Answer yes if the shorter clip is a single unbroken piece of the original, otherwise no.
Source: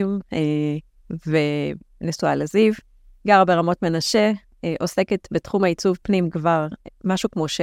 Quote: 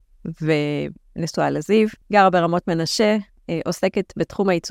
no